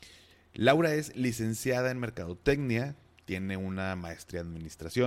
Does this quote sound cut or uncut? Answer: uncut